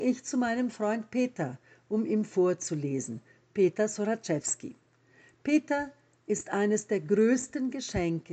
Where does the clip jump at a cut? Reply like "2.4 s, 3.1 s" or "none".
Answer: none